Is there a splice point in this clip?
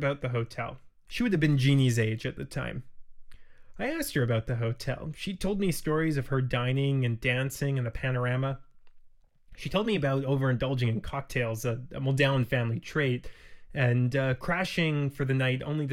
yes; 1 cut; at 1.1 s

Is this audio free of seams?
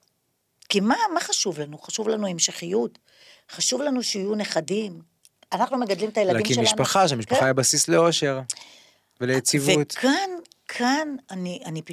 yes; 0 cuts

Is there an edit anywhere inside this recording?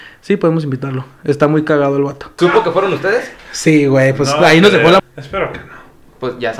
yes; 2 cuts; at 2.4 s, 5.0 s

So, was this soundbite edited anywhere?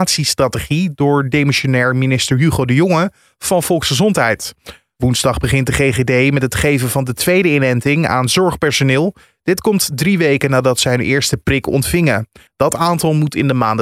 yes; 1 cut; at 12.5 s

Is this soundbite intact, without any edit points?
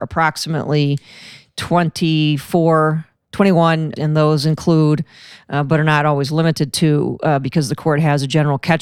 no; 1 cut; at 4.0 s

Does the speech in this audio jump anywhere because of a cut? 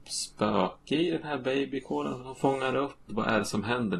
yes; 1 cut; at 3.1 s

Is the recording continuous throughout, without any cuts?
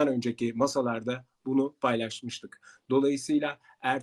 yes; 0 cuts

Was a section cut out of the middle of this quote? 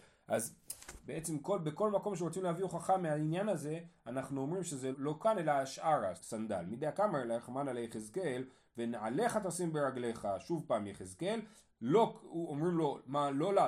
yes; 2 cuts; at 4.9 s, 6.2 s

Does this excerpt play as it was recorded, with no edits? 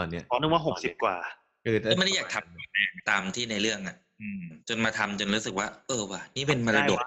no; 1 cut; at 4.6 s

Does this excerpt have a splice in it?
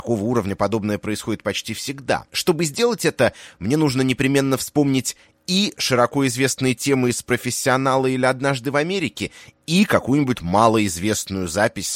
yes; 2 cuts; at 2.3 s, 10.3 s

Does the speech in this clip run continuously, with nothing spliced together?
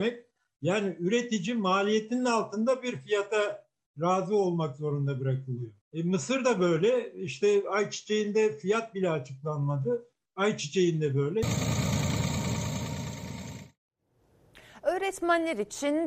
no; 1 cut; at 5.8 s

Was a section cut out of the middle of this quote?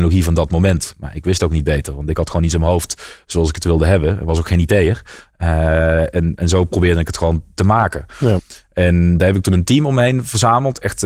no; 0 cuts

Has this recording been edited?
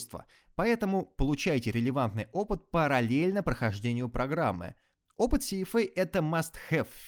yes; 1 cut; at 5.1 s

